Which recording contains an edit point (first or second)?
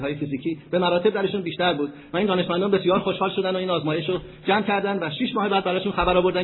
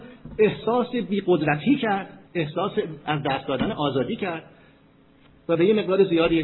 second